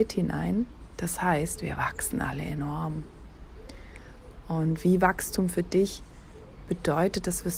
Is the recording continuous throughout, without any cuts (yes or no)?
yes